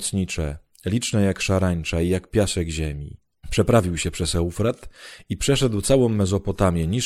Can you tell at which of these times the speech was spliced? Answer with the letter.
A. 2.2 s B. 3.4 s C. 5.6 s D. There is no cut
B